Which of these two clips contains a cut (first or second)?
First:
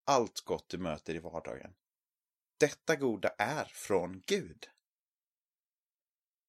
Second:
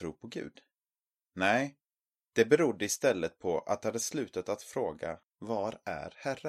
second